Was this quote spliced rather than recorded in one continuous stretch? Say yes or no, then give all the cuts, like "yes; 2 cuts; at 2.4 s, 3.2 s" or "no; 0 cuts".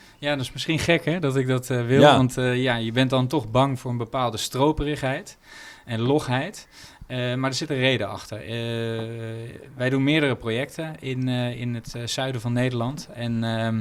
no; 0 cuts